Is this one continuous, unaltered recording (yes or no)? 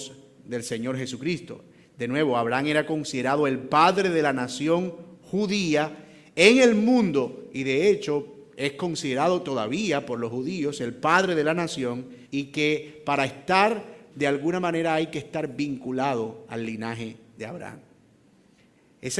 no